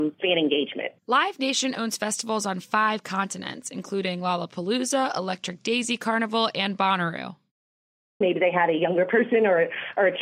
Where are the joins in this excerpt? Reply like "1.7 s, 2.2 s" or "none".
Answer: 1.0 s, 8.2 s

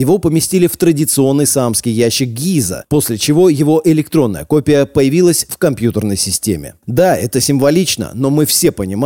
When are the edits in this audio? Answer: 2.8 s

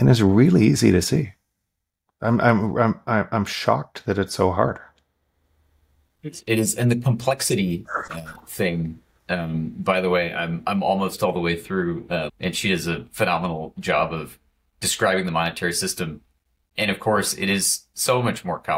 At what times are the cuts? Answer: 12.3 s

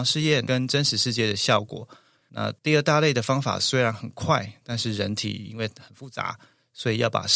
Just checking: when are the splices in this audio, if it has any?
2.2 s

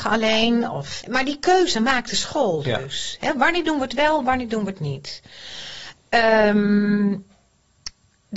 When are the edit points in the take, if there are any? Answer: 1.0 s

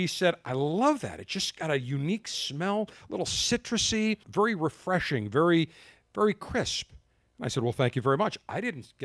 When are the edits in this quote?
4.2 s

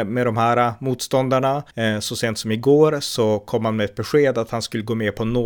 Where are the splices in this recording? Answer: 1.7 s

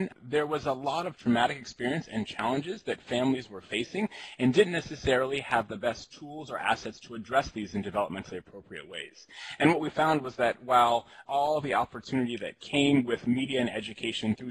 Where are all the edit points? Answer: none

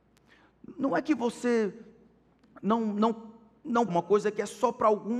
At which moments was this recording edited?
3.9 s

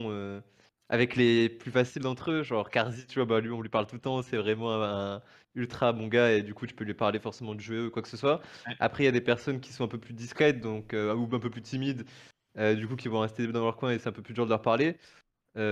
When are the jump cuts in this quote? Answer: none

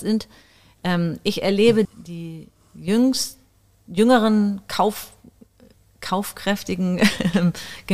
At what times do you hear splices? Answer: 1.8 s

